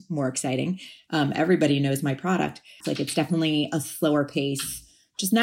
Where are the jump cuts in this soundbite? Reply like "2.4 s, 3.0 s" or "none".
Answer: 2.8 s